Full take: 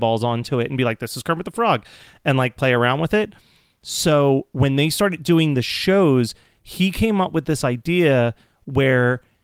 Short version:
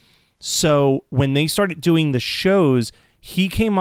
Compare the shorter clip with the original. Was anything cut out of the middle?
no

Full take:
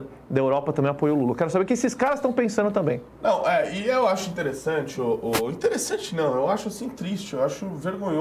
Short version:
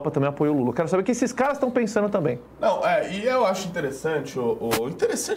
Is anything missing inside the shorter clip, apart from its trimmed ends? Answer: no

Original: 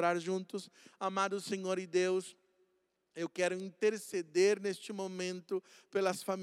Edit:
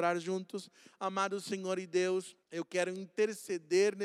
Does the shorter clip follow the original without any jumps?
no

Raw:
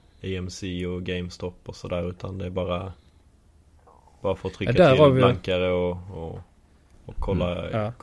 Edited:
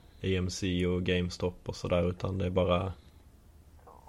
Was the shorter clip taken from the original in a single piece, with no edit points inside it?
yes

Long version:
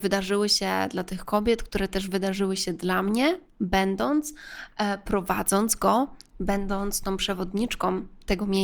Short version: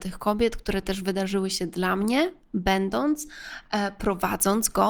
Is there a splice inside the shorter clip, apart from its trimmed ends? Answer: no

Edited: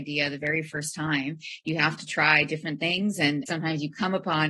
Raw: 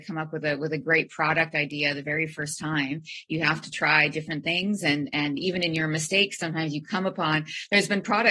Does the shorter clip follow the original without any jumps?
no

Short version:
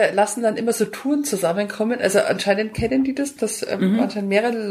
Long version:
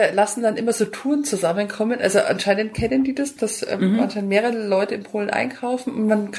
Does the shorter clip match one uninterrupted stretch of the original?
yes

